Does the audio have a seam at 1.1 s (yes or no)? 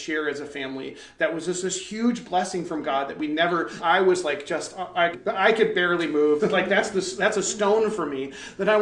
no